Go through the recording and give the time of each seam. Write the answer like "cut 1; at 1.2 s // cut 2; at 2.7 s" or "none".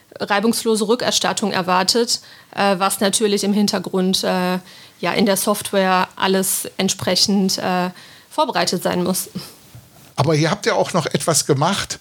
cut 1; at 10.1 s